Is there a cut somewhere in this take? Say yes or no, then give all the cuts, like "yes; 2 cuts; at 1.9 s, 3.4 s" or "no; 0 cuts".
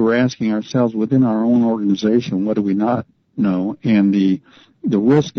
no; 0 cuts